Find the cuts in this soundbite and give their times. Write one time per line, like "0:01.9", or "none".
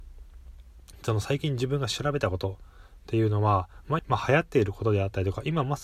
0:04.0